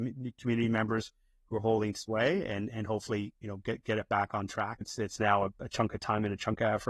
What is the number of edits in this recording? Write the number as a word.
two